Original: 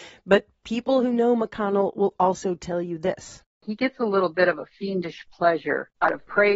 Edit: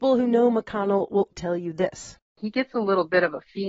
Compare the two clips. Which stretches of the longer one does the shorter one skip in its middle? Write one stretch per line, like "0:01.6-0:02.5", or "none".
0:02.2-0:02.6